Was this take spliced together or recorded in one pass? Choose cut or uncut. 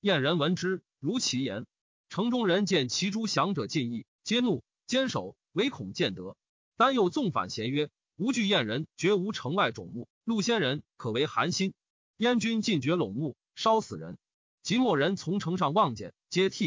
uncut